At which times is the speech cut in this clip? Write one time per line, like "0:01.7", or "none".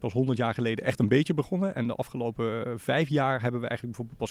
none